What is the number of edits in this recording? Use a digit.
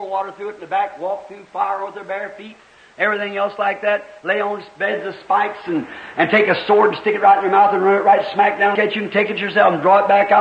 1